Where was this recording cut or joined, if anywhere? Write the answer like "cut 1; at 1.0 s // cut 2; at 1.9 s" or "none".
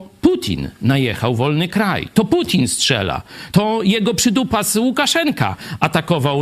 none

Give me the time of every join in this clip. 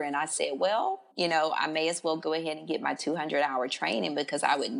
cut 1; at 1.1 s

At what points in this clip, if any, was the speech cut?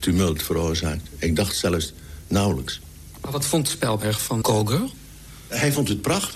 cut 1; at 4.4 s

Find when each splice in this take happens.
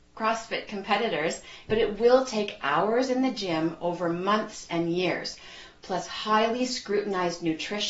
cut 1; at 1.7 s

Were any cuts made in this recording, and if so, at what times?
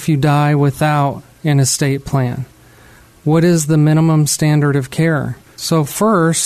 cut 1; at 5.5 s

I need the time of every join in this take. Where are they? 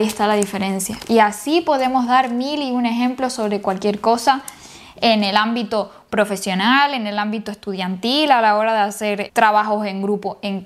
cut 1; at 9.3 s

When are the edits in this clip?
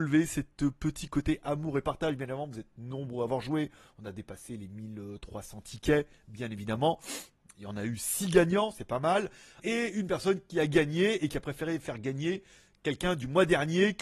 cut 1; at 9.6 s

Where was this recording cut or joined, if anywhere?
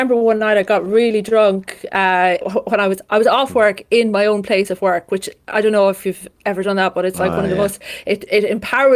cut 1; at 2.4 s

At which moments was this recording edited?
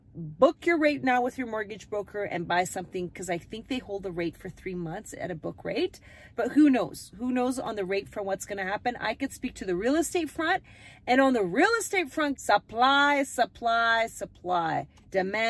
cut 1; at 6.3 s // cut 2; at 12.3 s

